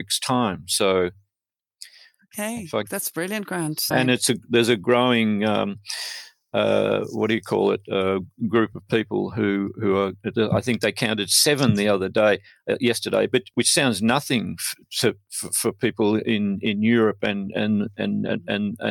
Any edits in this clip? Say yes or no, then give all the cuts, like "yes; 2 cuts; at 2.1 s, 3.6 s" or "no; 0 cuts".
yes; 1 cut; at 3.9 s